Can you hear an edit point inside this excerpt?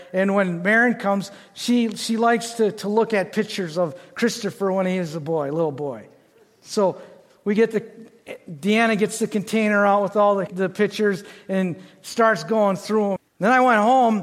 yes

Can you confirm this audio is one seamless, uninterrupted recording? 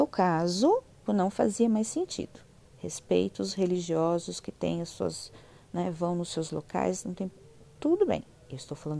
no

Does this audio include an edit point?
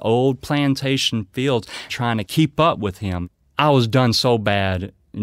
yes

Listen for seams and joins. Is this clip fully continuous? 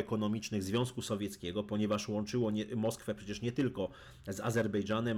yes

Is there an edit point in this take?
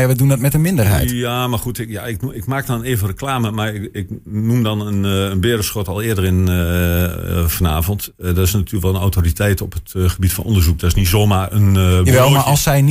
no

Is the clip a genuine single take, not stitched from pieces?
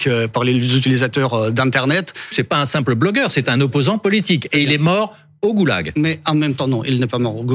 no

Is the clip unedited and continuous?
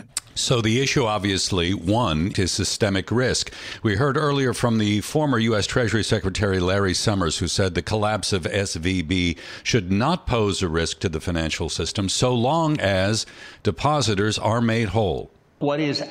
no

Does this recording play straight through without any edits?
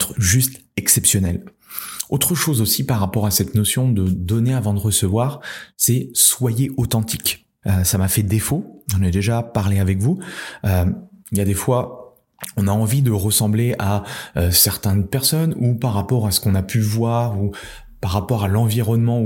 no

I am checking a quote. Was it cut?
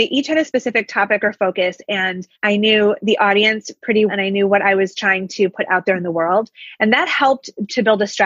yes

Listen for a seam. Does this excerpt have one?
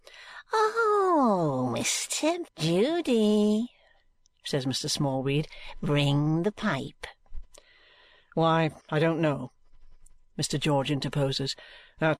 yes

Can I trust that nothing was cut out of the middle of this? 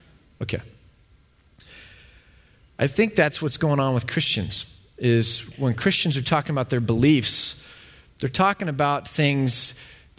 yes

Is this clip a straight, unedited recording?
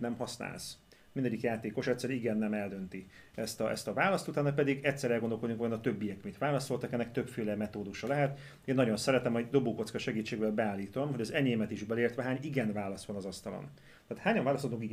yes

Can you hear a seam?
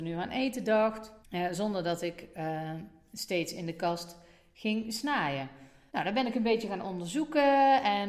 yes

